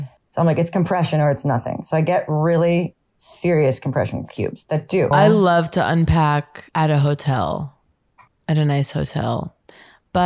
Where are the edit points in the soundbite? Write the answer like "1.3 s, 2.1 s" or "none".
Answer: 5.1 s, 6.7 s